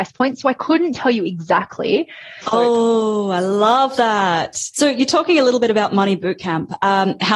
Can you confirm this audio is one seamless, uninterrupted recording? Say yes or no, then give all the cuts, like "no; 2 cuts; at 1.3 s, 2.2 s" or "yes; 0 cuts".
no; 2 cuts; at 2.4 s, 4.7 s